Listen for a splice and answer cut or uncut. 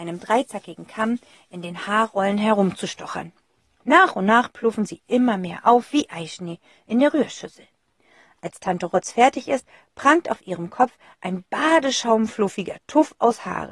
uncut